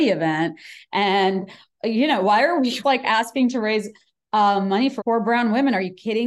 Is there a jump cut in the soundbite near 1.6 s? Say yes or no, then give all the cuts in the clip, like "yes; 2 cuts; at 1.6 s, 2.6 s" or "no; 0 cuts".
no; 2 cuts; at 2.8 s, 5.0 s